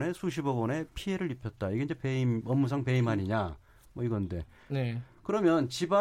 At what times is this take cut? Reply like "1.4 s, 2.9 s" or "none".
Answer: 4.7 s